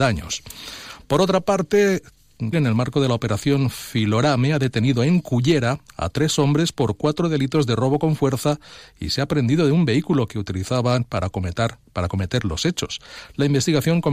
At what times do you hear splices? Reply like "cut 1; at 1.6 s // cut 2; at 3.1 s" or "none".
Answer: cut 1; at 2.5 s